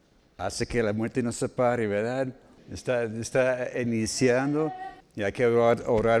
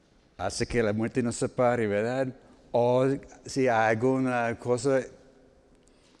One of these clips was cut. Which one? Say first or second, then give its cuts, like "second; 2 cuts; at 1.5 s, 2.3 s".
first; 2 cuts; at 2.6 s, 5.0 s